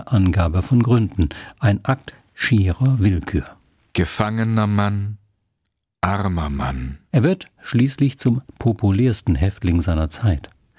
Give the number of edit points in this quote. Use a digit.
1